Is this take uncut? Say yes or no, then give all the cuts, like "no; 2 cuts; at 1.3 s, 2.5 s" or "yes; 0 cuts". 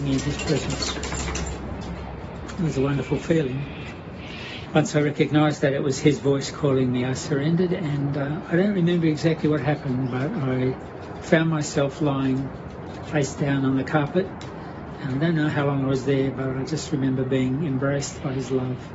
no; 1 cut; at 4.7 s